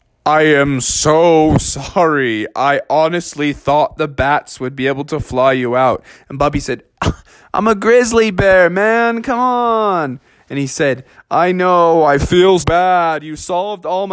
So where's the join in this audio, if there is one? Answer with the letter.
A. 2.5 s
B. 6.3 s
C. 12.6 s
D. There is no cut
C